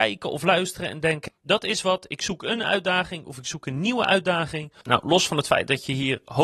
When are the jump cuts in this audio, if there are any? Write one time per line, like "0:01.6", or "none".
0:01.3
0:04.8